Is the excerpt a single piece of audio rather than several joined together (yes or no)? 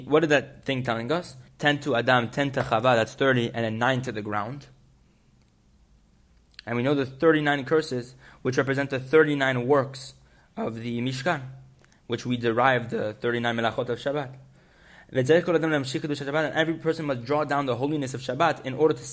no